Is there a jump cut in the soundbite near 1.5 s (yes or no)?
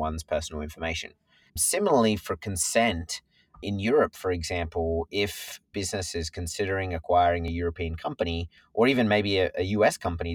yes